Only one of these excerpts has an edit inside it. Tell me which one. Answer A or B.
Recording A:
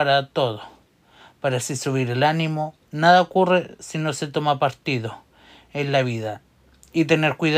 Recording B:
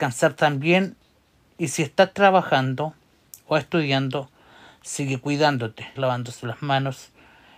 B